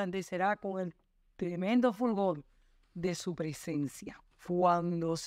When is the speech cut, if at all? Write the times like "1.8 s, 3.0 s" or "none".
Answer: 4.3 s